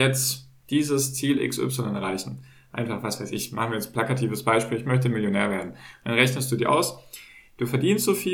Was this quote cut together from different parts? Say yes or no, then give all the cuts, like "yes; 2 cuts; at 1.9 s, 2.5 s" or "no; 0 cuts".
no; 0 cuts